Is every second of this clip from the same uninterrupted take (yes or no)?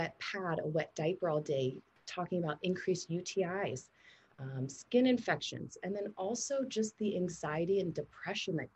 yes